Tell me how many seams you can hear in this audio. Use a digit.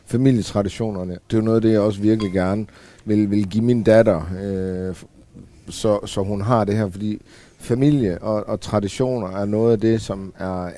1